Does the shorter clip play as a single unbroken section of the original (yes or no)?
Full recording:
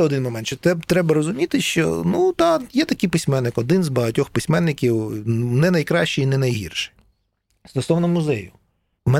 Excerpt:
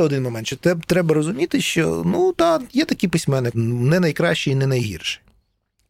no